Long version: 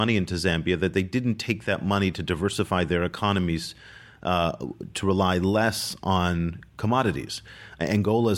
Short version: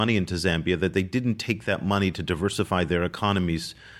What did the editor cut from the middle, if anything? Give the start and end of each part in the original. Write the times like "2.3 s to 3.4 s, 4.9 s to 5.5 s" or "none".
none